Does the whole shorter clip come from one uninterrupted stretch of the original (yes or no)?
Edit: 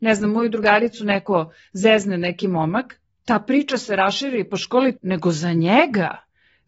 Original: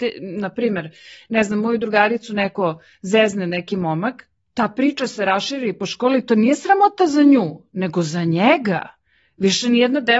no